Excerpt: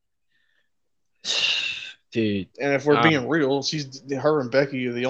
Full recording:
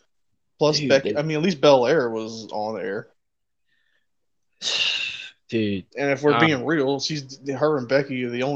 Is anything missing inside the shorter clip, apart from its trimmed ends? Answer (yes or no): no